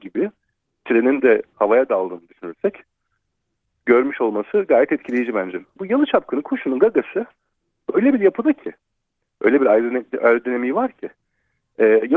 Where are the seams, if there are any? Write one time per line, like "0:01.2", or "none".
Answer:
0:05.8

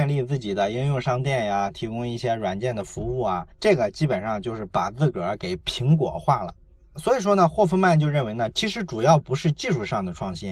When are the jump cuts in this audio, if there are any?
0:08.5

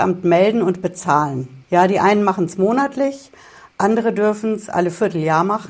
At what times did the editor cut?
0:01.6

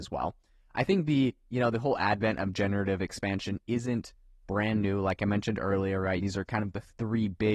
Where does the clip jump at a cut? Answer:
0:06.2

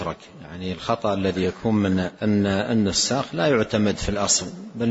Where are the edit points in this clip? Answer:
0:02.1

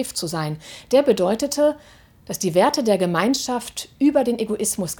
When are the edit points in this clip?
none

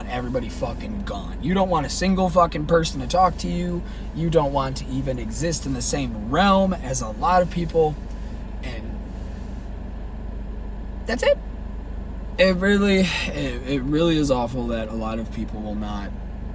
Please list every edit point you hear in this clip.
0:12.4

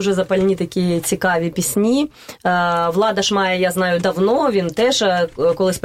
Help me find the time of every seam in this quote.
none

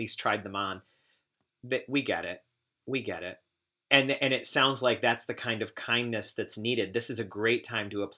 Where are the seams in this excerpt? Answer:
none

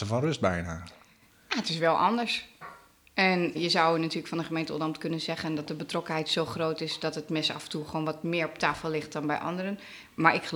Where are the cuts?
0:03.5

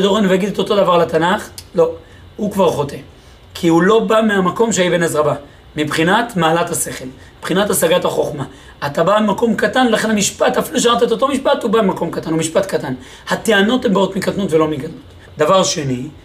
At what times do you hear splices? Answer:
0:15.2

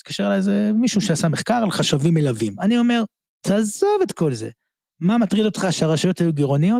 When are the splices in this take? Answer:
0:02.6

